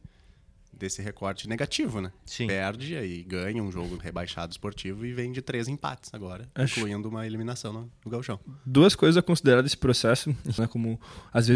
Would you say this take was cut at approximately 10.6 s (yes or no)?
yes